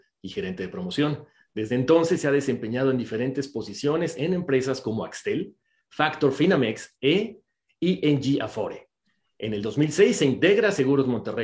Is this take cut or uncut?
uncut